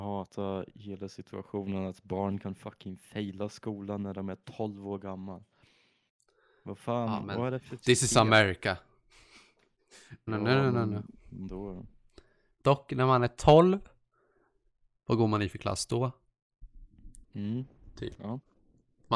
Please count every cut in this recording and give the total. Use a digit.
2